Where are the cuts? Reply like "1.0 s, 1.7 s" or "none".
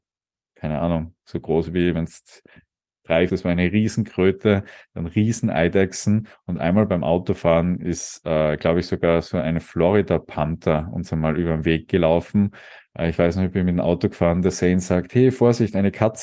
3.3 s